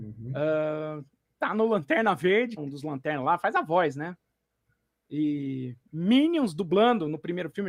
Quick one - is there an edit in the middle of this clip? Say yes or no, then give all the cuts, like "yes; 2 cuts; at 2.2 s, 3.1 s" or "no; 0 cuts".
yes; 1 cut; at 2.6 s